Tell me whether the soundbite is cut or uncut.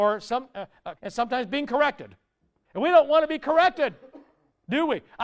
cut